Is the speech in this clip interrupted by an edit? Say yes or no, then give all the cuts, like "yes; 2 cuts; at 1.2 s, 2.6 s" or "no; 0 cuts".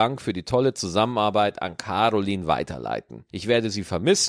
yes; 1 cut; at 3.3 s